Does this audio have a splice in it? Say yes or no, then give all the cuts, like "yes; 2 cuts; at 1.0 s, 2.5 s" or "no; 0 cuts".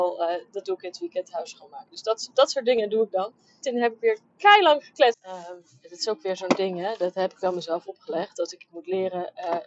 yes; 2 cuts; at 3.6 s, 5.1 s